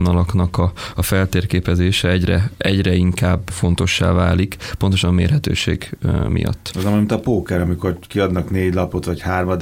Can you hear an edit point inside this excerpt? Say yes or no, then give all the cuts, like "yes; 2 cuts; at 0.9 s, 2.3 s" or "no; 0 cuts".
yes; 1 cut; at 3.5 s